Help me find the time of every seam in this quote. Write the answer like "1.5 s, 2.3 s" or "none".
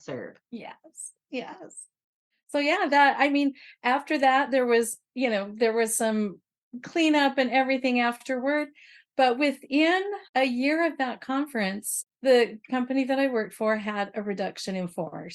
10.3 s, 12.1 s